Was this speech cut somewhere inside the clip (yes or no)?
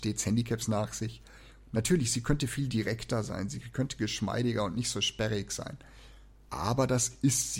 yes